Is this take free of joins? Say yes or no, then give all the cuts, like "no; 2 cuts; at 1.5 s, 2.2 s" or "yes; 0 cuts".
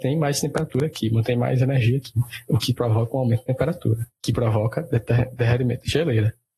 yes; 0 cuts